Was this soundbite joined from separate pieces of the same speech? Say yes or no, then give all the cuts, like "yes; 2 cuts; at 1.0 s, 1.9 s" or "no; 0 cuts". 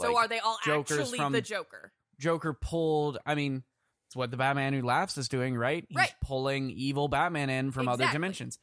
no; 0 cuts